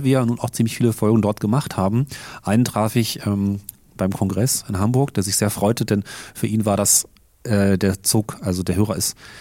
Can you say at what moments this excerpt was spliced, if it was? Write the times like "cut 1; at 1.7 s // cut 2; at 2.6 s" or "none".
none